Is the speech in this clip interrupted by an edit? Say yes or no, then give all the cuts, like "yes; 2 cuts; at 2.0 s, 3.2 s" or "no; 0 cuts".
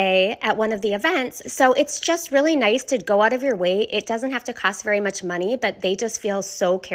yes; 1 cut; at 1.4 s